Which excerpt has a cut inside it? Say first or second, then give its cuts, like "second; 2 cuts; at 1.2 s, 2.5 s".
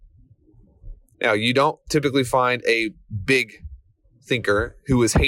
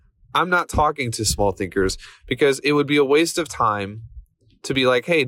first; 1 cut; at 1.1 s